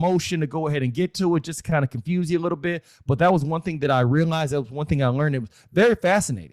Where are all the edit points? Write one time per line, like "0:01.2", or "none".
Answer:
none